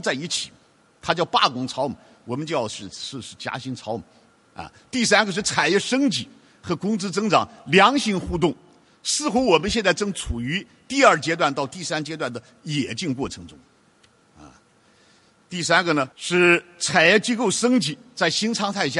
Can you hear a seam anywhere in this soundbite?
yes; 1 cut; at 16.1 s

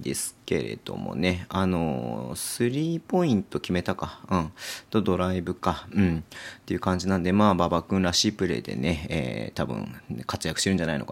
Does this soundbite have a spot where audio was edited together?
no; 0 cuts

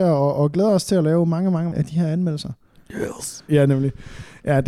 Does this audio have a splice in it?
yes; 2 cuts; at 1.7 s, 3.5 s

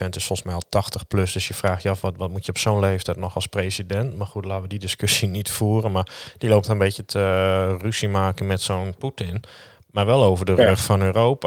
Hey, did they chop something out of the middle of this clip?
no; 0 cuts

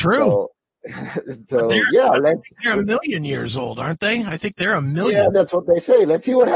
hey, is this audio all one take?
yes; 0 cuts

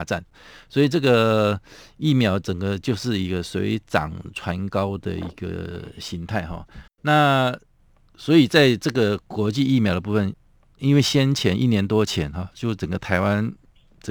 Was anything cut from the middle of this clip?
yes; 1 cut; at 6.9 s

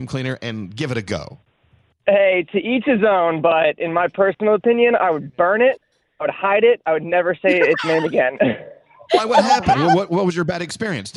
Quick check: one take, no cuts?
yes; 0 cuts

